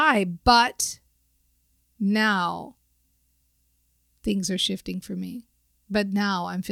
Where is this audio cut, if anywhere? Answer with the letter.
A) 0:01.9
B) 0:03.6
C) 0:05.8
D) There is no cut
D